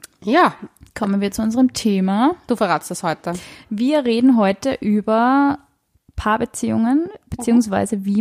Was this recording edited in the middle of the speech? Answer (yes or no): no